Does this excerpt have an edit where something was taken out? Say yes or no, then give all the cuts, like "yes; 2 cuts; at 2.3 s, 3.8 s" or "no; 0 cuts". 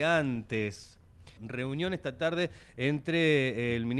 yes; 1 cut; at 1.4 s